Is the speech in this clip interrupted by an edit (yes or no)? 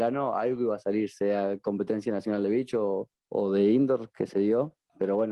no